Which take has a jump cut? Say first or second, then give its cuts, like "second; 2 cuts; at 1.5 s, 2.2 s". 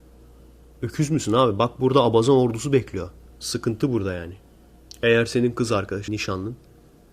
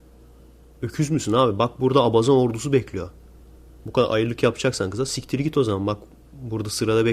first; 2 cuts; at 3.3 s, 6.1 s